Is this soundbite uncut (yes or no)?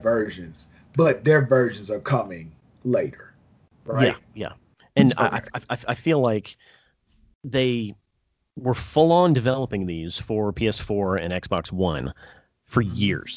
yes